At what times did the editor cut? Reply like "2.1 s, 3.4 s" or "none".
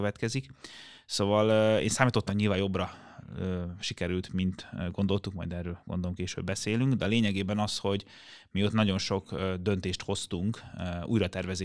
2.3 s